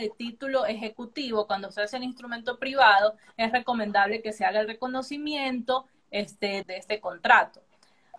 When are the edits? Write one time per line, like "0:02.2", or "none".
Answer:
0:06.6

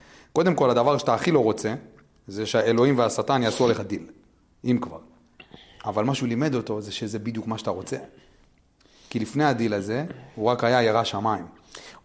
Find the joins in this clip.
none

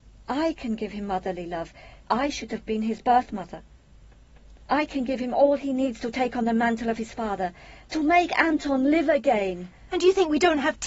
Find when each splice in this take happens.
0:02.0
0:04.7
0:07.9

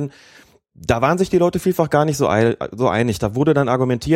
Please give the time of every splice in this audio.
none

